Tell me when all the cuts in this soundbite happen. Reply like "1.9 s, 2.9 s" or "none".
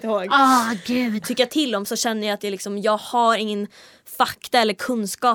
1.2 s

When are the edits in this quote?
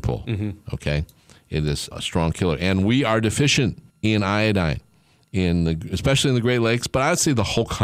1.9 s, 3.9 s

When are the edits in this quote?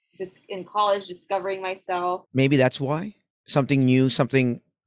2.3 s

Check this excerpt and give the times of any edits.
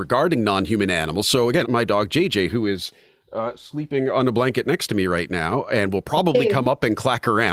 1.6 s

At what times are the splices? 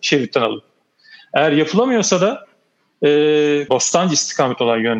3.7 s

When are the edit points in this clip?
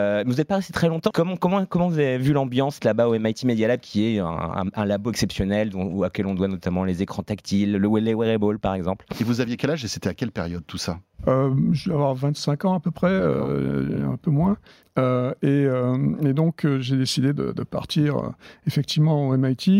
1.1 s, 14.8 s

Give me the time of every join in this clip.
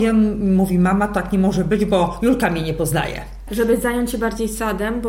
3.5 s

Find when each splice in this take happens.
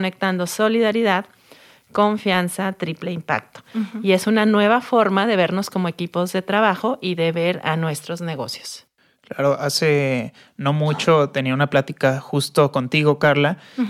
none

